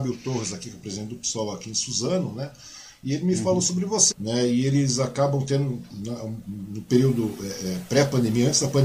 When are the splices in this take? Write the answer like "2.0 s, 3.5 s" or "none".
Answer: 4.1 s